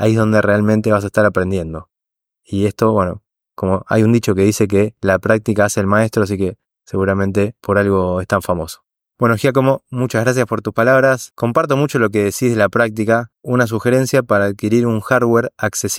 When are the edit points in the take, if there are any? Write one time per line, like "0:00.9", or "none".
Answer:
0:09.1
0:11.3
0:13.3